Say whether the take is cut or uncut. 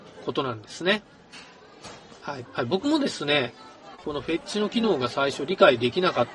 cut